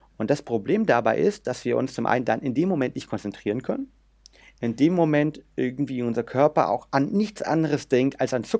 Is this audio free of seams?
yes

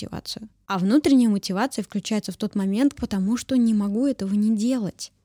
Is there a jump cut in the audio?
yes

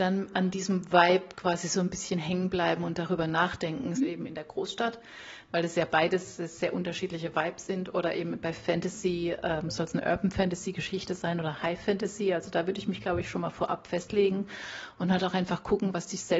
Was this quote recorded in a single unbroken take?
no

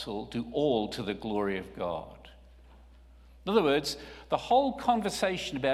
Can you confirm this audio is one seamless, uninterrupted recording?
yes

